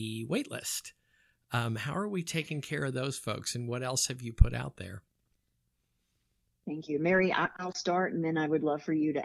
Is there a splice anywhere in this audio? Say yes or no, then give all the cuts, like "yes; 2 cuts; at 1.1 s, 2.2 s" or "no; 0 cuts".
no; 0 cuts